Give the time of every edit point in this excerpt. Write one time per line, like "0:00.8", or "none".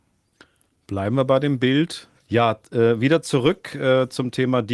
0:02.1

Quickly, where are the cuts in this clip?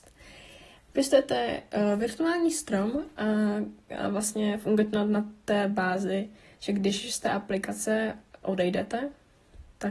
none

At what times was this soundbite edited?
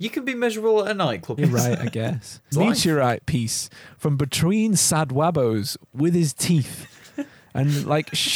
0:01.4
0:02.5

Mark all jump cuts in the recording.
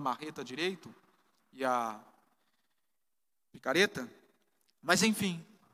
none

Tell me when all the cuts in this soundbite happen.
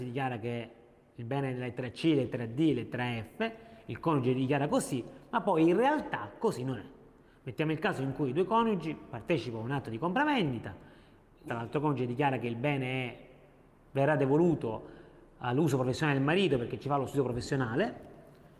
0:11.5

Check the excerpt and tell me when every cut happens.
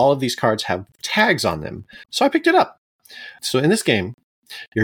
0:02.0
0:03.4

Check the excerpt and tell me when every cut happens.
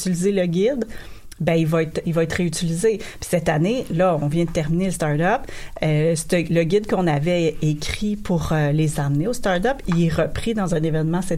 none

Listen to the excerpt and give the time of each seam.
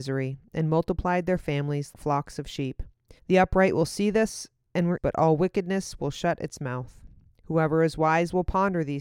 0:01.9
0:03.2
0:05.0

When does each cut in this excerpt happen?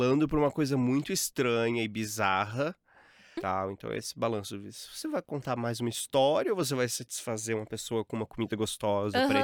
0:03.4

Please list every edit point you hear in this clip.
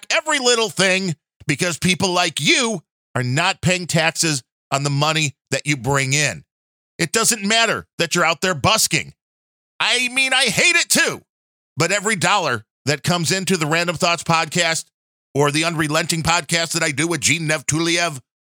none

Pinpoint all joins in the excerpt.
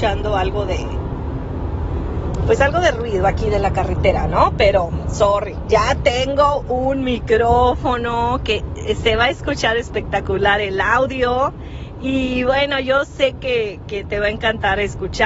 none

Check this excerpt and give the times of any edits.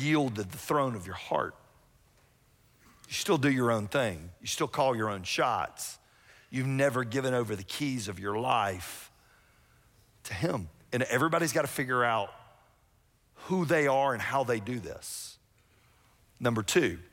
none

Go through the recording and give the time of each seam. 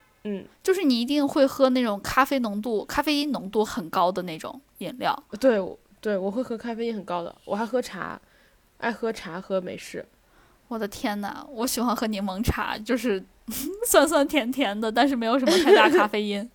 0:03.7

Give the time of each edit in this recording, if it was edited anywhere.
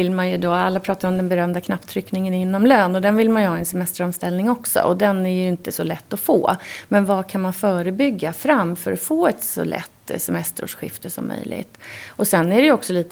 none

